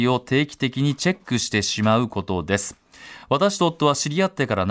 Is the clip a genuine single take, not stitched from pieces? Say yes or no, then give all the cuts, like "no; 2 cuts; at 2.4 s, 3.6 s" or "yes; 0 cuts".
yes; 0 cuts